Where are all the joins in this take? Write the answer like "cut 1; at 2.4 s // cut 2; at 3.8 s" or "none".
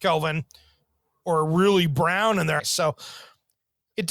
cut 1; at 2.6 s